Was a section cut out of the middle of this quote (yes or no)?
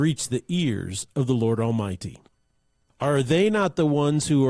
yes